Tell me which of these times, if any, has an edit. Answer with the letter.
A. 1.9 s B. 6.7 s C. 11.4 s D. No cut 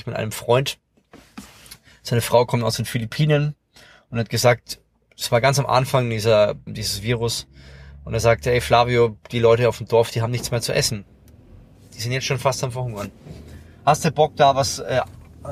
B